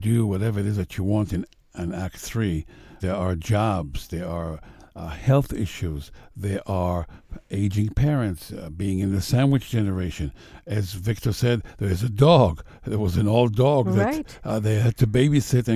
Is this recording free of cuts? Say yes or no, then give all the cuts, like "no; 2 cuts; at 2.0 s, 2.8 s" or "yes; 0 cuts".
no; 1 cut; at 3.0 s